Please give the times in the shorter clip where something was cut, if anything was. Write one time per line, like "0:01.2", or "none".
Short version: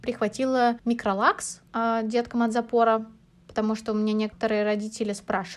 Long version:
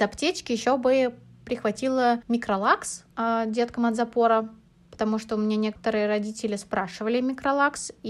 none